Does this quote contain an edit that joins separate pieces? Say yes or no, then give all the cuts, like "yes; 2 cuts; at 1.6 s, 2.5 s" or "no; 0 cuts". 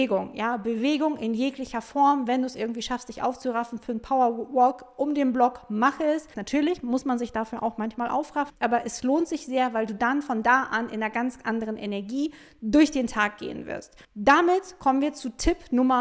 yes; 3 cuts; at 6.3 s, 8.5 s, 14.0 s